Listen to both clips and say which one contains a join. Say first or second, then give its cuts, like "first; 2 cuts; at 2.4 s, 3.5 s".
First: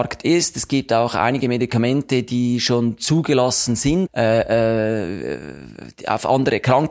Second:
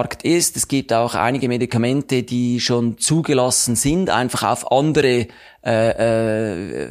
first; 1 cut; at 4.1 s